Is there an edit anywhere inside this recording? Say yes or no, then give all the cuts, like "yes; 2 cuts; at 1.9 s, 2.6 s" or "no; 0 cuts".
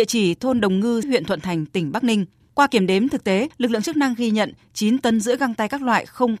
yes; 1 cut; at 1.0 s